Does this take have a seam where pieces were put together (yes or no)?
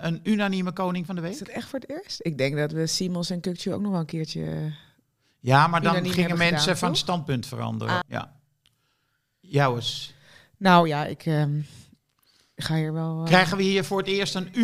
yes